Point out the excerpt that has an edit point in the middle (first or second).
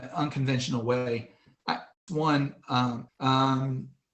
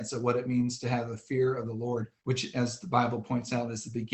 first